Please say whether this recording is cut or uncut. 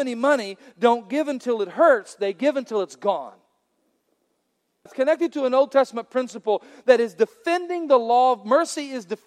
cut